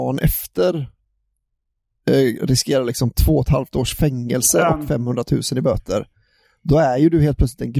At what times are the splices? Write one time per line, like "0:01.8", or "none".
none